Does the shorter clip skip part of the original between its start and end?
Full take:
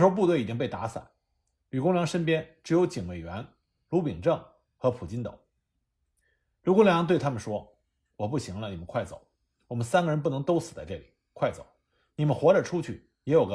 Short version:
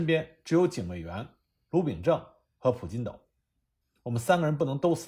yes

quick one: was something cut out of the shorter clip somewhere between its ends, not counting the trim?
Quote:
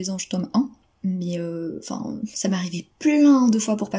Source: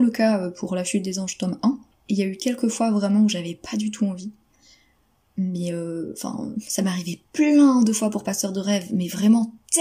yes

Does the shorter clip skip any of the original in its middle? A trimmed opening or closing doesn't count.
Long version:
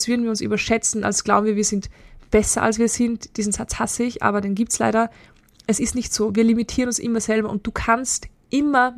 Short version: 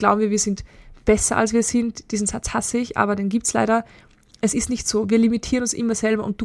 no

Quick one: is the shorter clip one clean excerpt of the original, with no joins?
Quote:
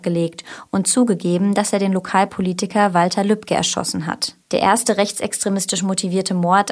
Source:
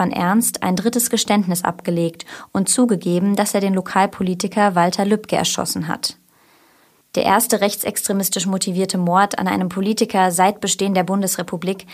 no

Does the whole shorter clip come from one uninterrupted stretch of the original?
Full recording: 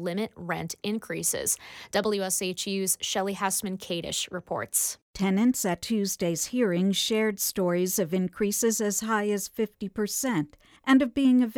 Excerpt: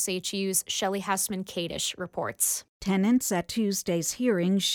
yes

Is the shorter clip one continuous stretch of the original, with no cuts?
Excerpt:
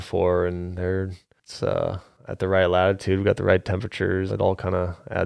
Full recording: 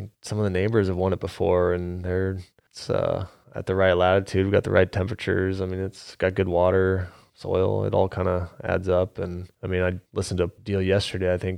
no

